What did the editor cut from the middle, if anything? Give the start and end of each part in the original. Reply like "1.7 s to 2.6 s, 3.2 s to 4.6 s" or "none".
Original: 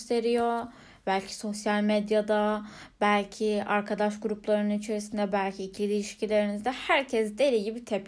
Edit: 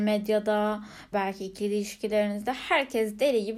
2.9 s to 5.3 s